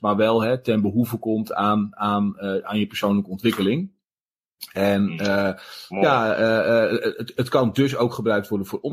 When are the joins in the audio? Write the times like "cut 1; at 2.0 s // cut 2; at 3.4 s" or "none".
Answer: none